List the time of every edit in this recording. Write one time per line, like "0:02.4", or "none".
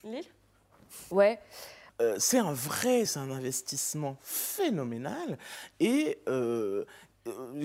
0:01.9
0:03.1